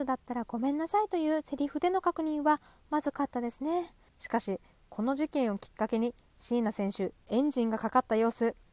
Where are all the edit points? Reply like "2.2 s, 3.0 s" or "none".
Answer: 4.1 s